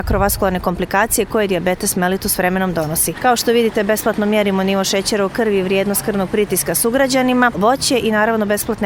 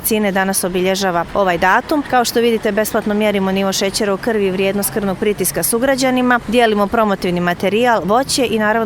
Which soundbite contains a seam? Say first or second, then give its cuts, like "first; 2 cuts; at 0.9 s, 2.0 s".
first; 2 cuts; at 3.1 s, 7.5 s